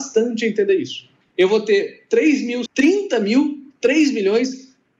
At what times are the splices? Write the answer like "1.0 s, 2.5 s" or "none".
1.2 s, 2.7 s

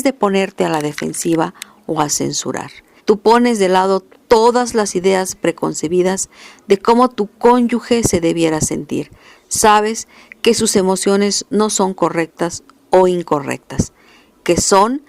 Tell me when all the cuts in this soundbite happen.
3.0 s

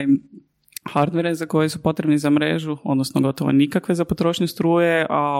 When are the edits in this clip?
none

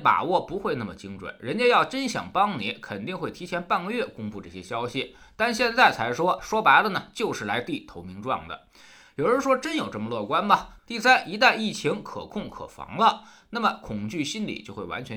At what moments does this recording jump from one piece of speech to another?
10.8 s

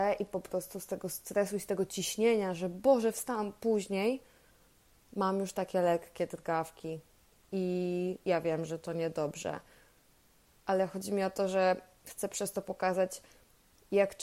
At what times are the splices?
none

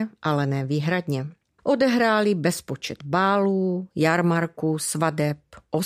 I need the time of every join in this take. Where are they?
1.6 s

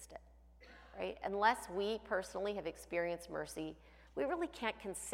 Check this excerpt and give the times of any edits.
none

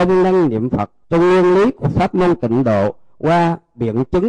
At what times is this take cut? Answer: 1.0 s

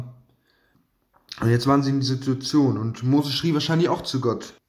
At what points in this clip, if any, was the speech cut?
none

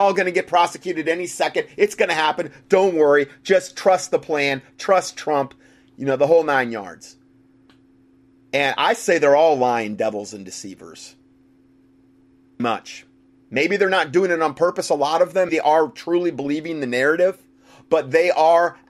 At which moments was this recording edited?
12.6 s, 15.5 s

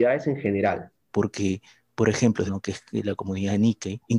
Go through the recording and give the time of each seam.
1.1 s, 2.5 s

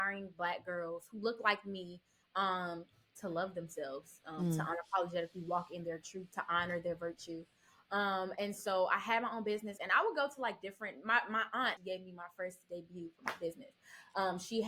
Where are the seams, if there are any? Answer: 9.8 s, 11.8 s

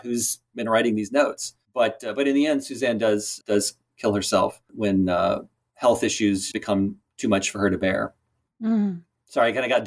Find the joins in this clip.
3.4 s, 6.5 s

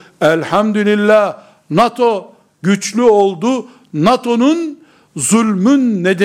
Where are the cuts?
none

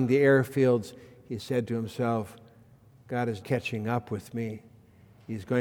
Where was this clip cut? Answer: 3.4 s

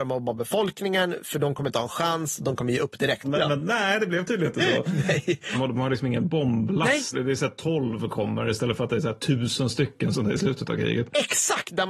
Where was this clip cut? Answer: 3.2 s, 5.5 s, 7.1 s

